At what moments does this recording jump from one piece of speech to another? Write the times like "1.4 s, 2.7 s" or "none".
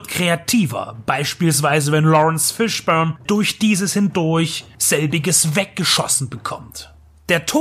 3.3 s